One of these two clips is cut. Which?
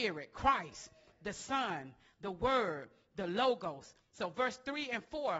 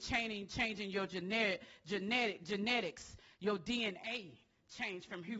first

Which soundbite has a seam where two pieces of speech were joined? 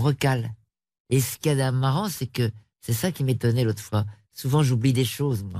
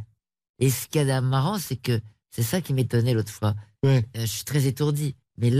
second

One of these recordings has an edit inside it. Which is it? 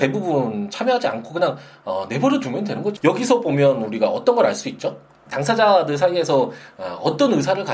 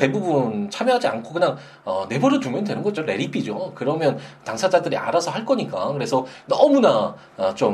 first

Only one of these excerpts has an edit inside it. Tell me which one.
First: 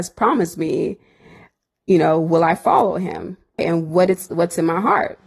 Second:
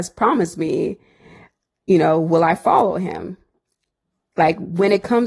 first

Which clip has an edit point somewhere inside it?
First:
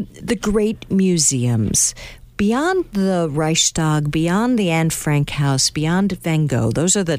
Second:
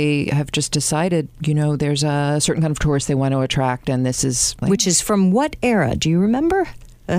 second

